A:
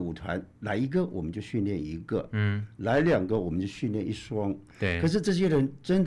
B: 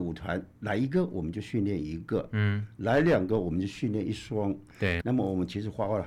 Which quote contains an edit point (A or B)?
B